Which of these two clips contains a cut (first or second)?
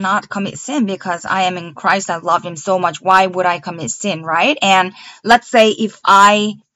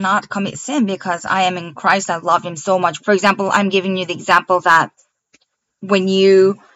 second